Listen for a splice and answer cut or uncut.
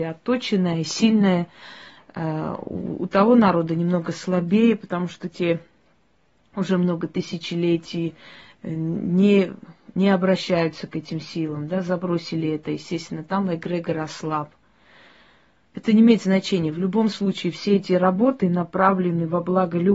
uncut